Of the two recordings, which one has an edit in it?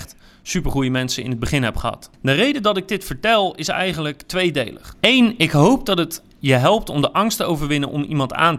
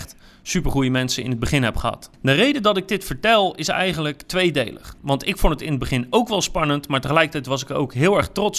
second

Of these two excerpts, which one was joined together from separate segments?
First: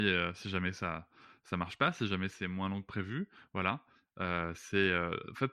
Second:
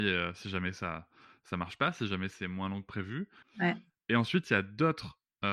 second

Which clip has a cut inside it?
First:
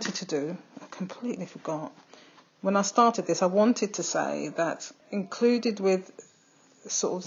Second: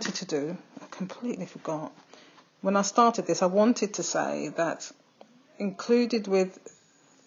first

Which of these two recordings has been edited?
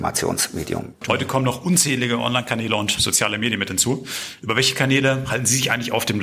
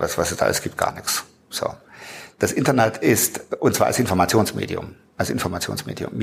first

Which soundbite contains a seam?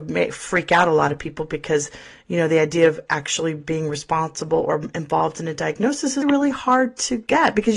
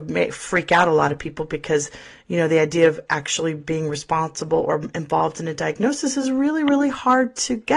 first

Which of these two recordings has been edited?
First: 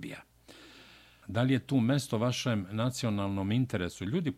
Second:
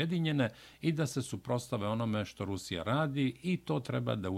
first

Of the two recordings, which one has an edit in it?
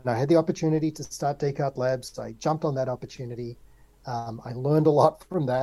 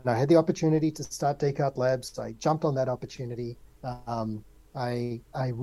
second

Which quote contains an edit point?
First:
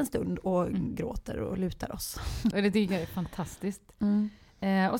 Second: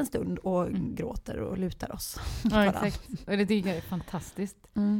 first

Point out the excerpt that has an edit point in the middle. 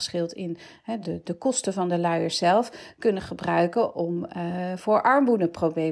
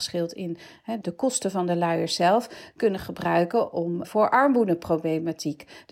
second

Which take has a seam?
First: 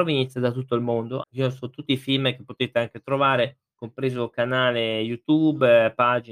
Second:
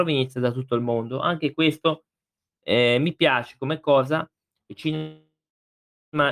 first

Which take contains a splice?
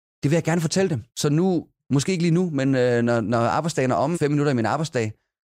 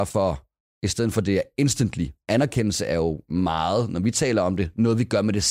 first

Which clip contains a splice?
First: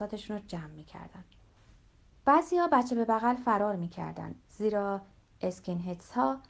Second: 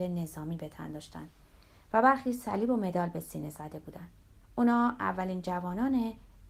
second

